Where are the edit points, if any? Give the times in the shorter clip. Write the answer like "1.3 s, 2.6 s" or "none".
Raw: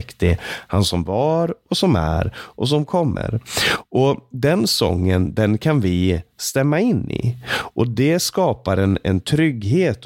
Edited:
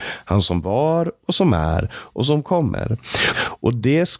3.3 s